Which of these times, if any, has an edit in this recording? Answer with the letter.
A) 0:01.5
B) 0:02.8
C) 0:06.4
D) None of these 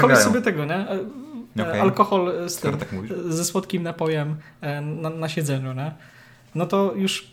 A